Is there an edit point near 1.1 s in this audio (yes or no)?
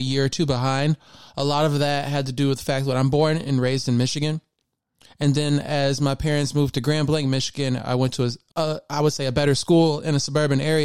no